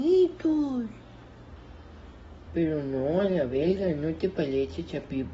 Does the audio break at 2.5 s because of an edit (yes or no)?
yes